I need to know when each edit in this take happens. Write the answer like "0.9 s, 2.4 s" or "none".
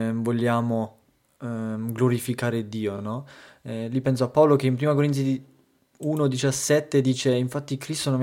none